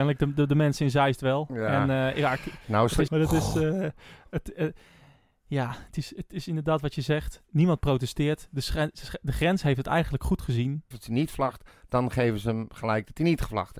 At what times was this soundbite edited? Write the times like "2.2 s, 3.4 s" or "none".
3.1 s, 10.9 s